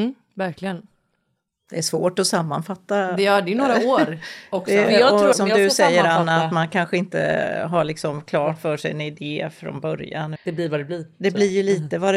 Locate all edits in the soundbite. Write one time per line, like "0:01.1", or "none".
0:05.3
0:10.4